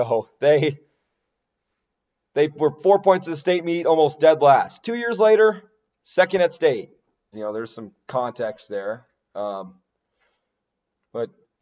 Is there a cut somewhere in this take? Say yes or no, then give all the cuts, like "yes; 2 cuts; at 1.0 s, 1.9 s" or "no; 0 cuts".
yes; 1 cut; at 7.3 s